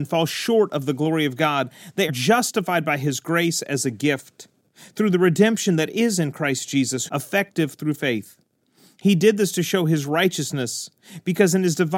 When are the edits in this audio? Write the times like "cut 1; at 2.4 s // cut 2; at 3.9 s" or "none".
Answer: cut 1; at 2.1 s // cut 2; at 7.1 s